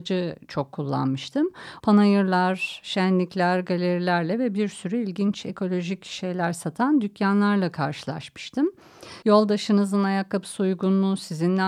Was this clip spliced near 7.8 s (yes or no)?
no